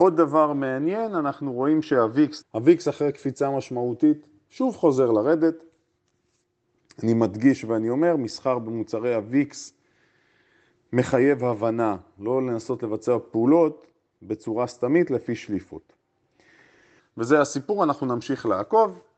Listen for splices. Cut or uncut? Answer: cut